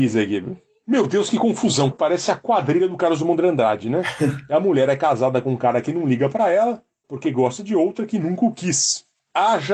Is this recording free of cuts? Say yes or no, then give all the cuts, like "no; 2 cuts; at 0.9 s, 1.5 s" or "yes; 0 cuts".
no; 1 cut; at 1.9 s